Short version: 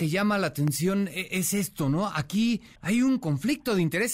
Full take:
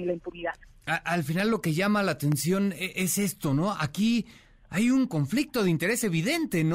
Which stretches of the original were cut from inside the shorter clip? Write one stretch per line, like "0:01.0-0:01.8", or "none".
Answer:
0:04.4-0:04.6